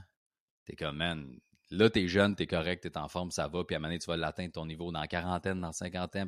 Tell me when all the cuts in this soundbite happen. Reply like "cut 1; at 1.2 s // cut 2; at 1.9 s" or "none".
none